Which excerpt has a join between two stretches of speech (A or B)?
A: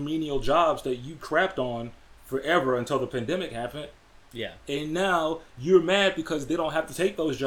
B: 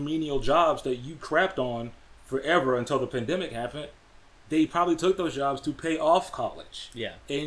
A